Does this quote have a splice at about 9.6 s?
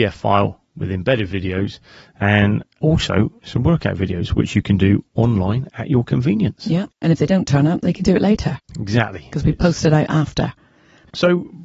no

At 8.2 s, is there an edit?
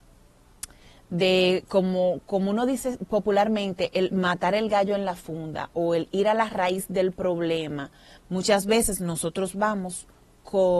yes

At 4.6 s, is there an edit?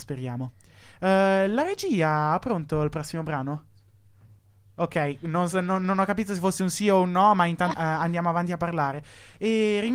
no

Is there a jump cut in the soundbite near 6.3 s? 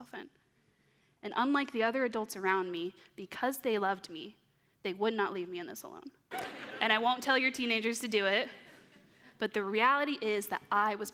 yes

